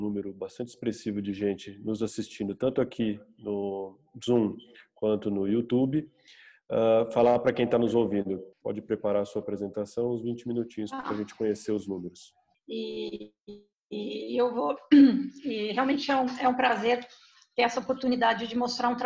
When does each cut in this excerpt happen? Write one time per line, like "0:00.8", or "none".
0:08.5
0:12.5
0:13.7